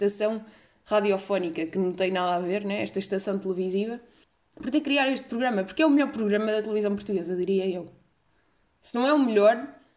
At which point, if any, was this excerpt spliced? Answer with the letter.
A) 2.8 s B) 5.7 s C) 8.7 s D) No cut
D